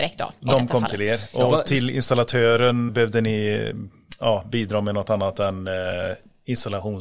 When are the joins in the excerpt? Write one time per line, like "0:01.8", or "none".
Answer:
0:02.9